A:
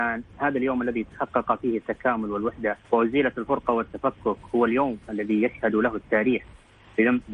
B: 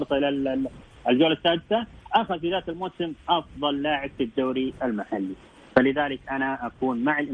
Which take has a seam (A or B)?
A